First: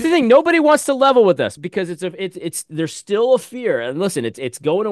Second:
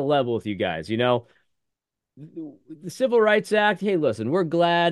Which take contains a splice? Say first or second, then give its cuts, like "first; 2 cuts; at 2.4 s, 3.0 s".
first; 1 cut; at 1.6 s